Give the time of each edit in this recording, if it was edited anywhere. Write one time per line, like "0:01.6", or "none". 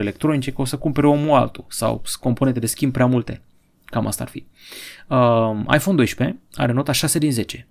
none